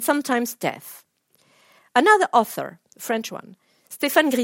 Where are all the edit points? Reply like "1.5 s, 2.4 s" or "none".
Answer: none